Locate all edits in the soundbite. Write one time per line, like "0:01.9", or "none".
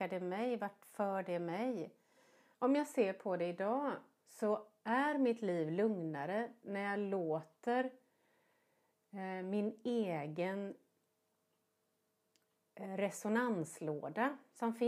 0:02.5